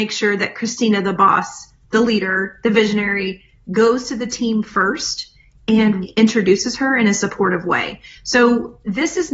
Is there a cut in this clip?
yes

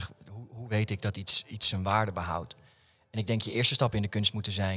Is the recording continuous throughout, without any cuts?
yes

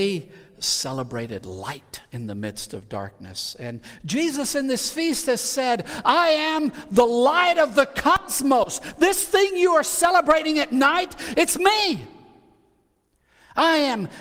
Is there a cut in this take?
no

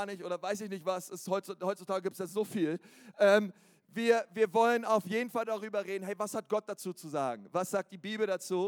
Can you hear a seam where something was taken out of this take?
no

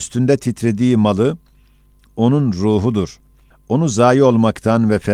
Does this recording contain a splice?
no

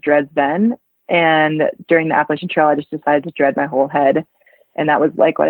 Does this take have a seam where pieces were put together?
no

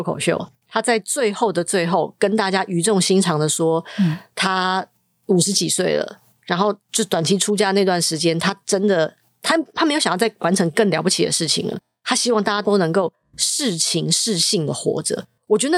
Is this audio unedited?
yes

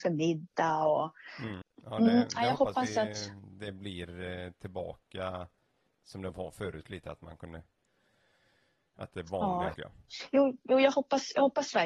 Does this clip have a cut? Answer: yes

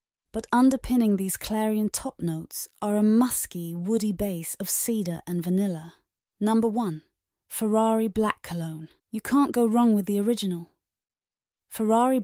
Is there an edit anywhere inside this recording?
yes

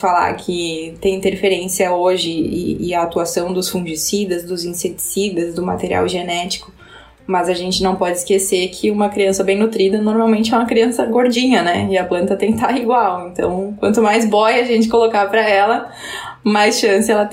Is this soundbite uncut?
yes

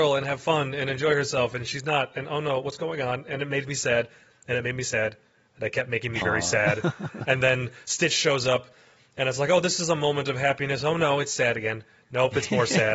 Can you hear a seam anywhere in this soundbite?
yes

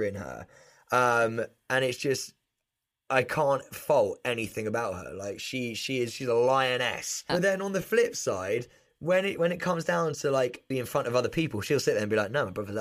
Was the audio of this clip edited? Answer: yes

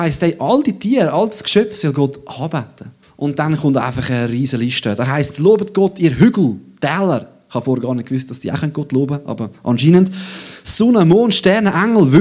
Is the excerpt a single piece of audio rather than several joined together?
no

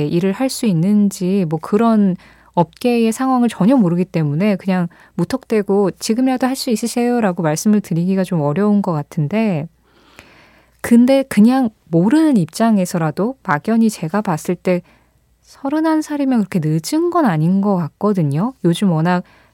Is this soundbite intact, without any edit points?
yes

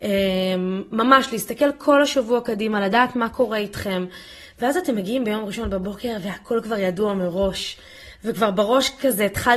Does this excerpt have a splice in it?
no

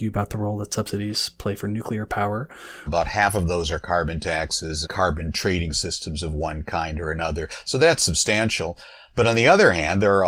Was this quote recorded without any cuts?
no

